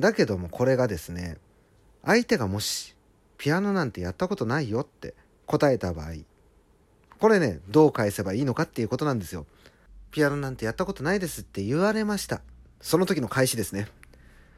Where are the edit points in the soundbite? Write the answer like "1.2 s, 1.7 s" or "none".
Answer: none